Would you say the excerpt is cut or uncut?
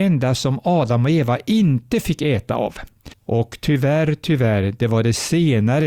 cut